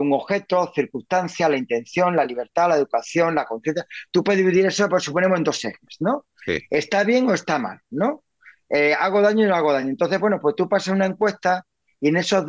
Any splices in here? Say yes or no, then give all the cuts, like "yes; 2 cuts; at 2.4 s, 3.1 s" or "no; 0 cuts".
no; 0 cuts